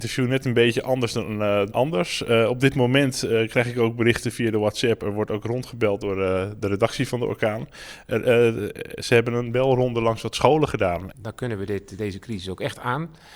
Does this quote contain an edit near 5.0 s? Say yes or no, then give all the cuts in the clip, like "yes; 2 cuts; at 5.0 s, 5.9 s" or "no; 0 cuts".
no; 2 cuts; at 1.7 s, 11.1 s